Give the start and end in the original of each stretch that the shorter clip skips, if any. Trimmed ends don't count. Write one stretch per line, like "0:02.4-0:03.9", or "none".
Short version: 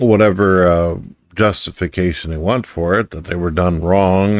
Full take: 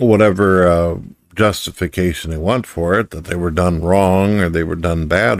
none